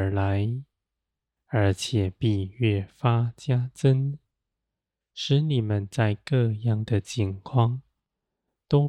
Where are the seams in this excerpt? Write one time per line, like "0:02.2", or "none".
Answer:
none